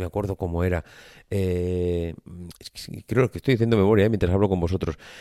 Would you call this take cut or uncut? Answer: cut